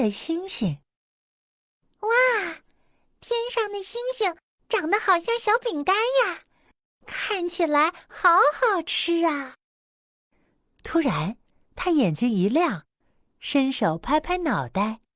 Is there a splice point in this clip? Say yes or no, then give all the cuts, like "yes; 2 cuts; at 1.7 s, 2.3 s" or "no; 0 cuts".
no; 0 cuts